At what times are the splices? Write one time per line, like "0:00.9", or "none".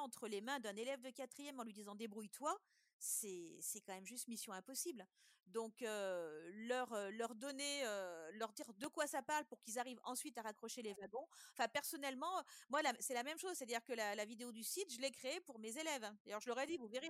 none